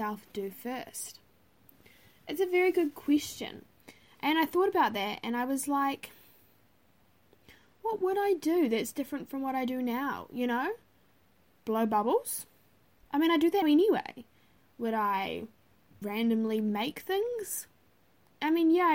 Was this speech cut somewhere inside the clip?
yes; 2 cuts; at 13.6 s, 16.0 s

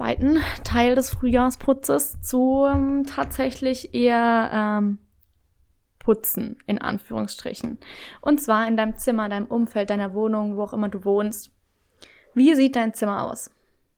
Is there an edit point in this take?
no; 0 cuts

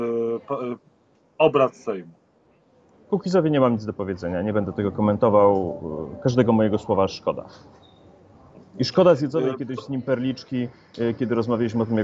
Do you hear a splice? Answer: no; 0 cuts

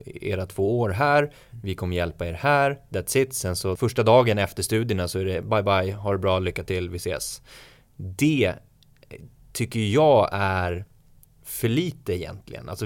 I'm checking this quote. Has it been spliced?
no; 0 cuts

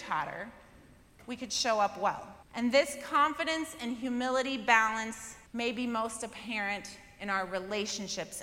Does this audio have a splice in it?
yes; 2 cuts; at 2.4 s, 5.5 s

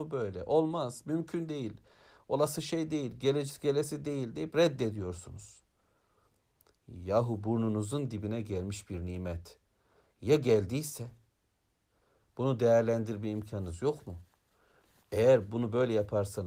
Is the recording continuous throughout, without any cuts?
yes; 0 cuts

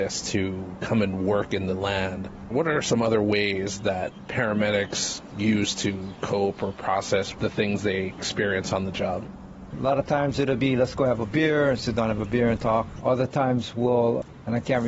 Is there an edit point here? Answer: yes; 2 cuts; at 9.7 s, 13.0 s

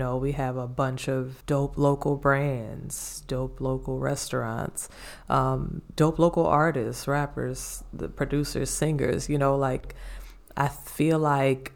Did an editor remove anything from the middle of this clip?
yes; 1 cut; at 1.4 s

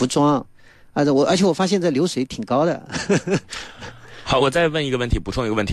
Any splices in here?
no; 0 cuts

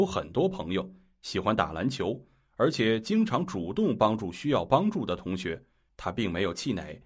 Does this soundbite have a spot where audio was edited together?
yes; 1 cut; at 5.9 s

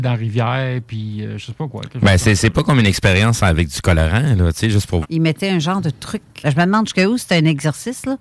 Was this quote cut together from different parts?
yes; 2 cuts; at 5.0 s, 6.4 s

